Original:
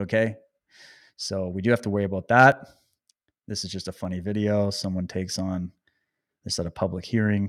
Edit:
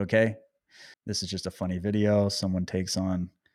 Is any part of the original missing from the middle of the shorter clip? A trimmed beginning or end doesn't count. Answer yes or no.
yes